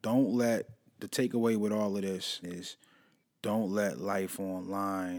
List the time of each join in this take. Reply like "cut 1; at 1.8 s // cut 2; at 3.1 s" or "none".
cut 1; at 2.4 s